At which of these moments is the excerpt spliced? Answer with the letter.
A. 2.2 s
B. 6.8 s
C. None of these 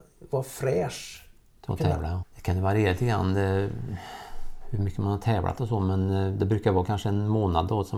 A